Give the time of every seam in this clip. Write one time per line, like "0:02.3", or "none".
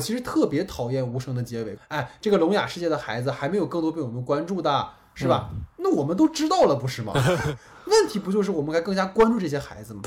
0:01.8